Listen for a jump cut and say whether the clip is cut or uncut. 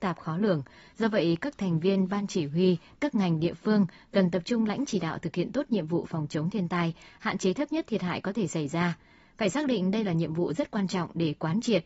cut